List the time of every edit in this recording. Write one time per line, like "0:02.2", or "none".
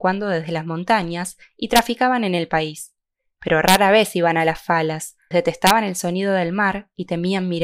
0:05.3